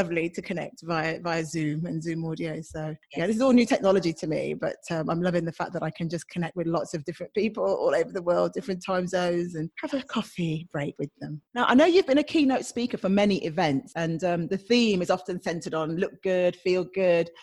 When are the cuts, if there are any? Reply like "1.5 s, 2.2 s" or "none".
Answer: 11.5 s